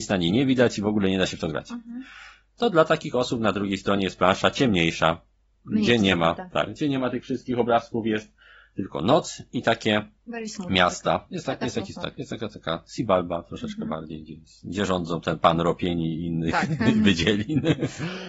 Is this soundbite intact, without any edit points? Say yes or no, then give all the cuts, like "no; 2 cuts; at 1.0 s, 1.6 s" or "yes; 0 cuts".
yes; 0 cuts